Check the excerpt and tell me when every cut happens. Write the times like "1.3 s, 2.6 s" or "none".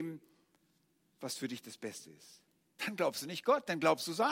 2.8 s